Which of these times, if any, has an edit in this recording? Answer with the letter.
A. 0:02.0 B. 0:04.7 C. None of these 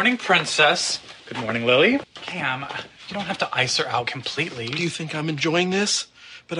A